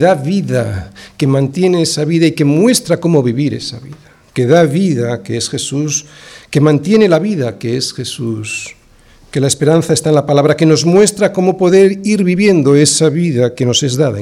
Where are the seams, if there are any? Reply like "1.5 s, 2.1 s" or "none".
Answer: none